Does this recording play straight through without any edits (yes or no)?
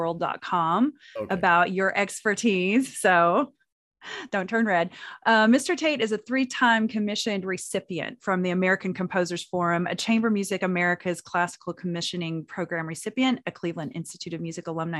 yes